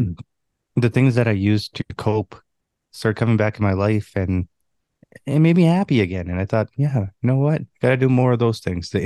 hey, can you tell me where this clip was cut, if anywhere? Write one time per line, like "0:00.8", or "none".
none